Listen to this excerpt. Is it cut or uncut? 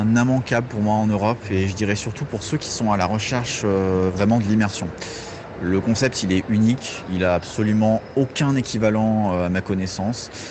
uncut